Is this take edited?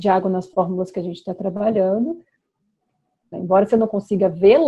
yes; 1 cut; at 3.3 s

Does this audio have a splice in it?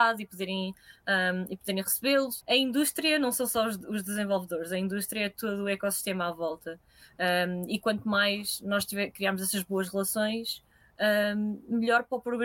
yes; 1 cut; at 2.4 s

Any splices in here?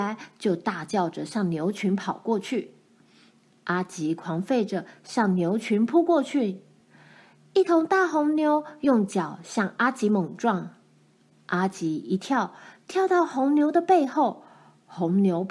no; 0 cuts

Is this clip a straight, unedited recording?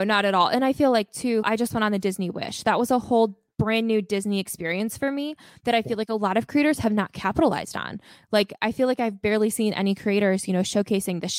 no; 1 cut; at 1.4 s

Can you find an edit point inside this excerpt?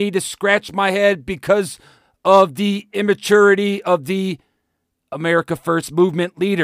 no; 0 cuts

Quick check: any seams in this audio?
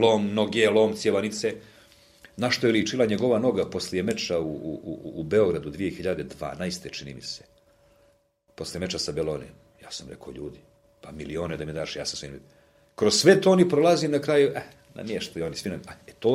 no; 0 cuts

